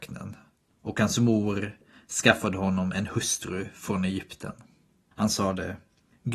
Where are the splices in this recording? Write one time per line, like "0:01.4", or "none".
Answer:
0:05.1